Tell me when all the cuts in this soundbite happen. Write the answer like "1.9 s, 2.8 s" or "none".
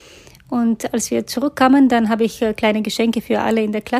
none